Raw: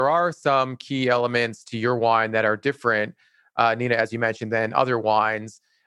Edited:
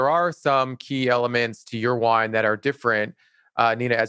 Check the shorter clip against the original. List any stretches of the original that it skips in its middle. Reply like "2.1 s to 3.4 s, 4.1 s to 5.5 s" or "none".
none